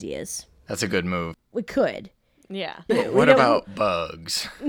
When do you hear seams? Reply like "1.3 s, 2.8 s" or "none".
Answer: 1.3 s, 2.9 s

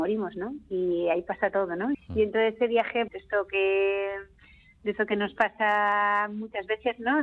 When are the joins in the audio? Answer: 1.9 s, 3.1 s

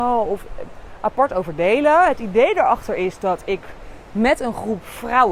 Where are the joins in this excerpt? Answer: none

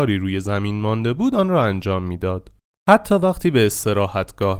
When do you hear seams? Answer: 2.7 s

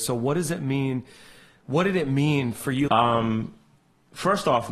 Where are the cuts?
2.9 s

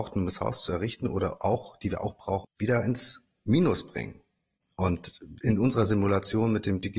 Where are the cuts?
2.4 s

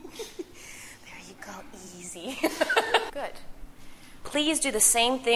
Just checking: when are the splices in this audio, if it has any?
3.1 s, 4.2 s

